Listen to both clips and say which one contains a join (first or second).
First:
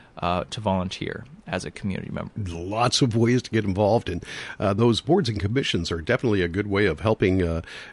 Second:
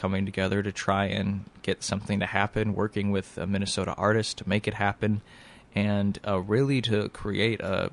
first